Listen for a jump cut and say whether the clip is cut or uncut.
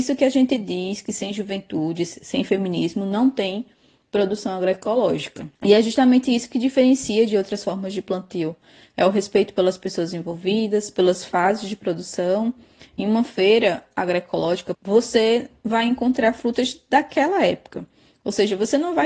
cut